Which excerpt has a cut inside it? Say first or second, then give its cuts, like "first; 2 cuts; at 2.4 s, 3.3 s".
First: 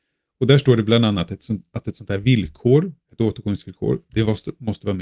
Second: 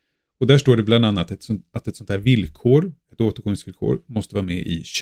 second; 1 cut; at 4.0 s